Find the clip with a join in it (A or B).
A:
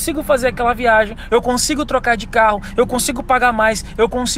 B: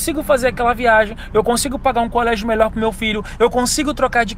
A